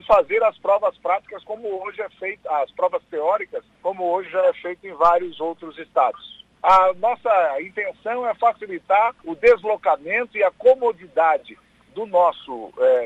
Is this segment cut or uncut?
cut